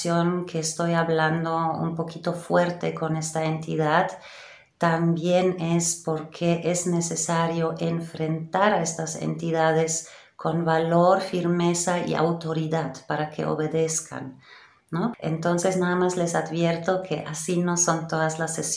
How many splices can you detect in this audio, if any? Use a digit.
1